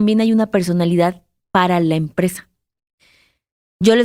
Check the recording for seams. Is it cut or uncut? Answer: uncut